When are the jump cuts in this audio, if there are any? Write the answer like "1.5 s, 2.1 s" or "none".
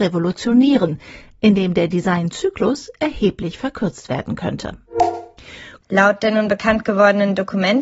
5.8 s